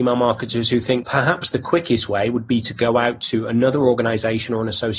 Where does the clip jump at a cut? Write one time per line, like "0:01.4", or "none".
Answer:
0:01.0